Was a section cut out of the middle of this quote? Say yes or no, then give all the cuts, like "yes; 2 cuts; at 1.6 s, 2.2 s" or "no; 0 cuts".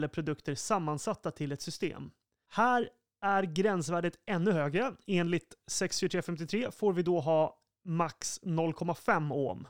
no; 0 cuts